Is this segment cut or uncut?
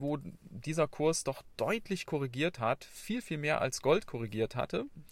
uncut